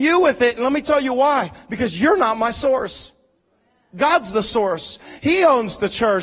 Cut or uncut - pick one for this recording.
uncut